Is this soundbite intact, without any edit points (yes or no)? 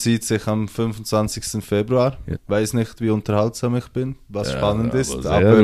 no